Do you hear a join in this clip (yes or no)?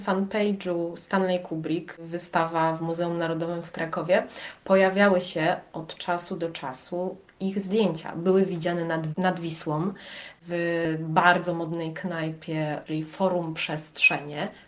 no